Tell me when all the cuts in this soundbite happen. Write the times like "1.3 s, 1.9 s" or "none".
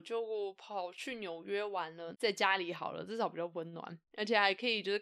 2.1 s